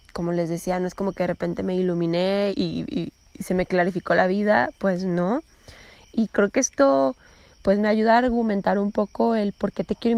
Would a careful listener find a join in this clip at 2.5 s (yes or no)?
yes